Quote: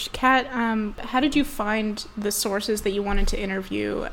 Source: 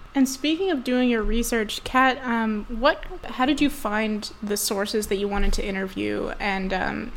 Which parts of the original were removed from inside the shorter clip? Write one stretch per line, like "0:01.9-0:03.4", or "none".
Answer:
0:02.7-0:03.2